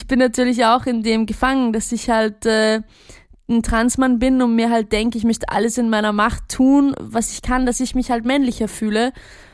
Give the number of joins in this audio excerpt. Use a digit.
0